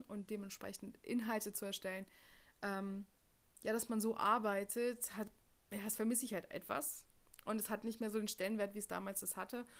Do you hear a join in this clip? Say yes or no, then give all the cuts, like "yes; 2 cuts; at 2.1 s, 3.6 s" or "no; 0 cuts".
no; 0 cuts